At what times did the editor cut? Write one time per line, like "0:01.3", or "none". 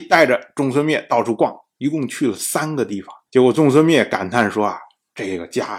0:03.3